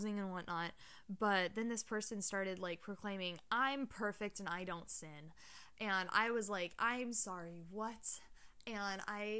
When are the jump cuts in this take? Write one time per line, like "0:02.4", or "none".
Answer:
none